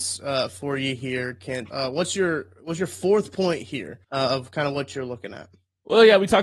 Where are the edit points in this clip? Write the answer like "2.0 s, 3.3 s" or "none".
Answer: 1.7 s, 4.0 s